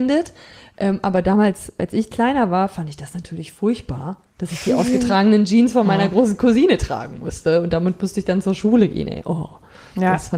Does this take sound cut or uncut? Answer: uncut